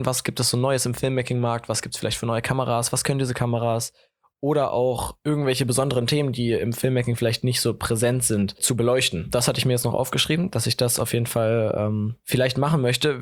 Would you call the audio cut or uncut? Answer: uncut